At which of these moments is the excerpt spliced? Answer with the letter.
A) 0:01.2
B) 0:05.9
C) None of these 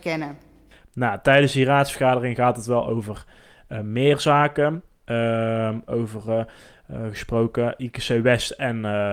B